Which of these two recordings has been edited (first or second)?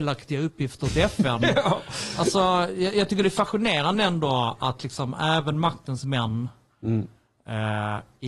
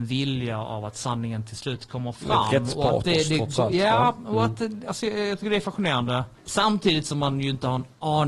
second